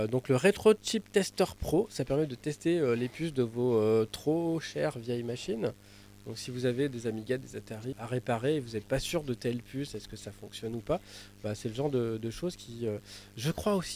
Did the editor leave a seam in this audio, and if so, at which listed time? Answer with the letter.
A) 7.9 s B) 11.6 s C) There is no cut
A